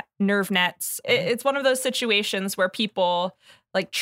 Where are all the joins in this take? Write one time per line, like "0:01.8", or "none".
0:01.0